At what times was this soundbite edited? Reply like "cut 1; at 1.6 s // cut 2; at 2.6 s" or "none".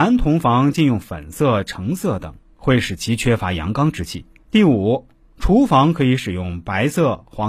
cut 1; at 4.4 s